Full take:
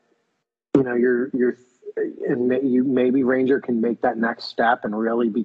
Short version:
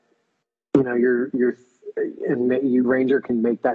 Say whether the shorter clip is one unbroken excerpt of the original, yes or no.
no